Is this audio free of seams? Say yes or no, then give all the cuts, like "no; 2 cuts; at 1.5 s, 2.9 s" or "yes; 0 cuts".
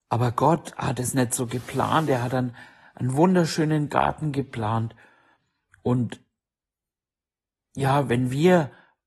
yes; 0 cuts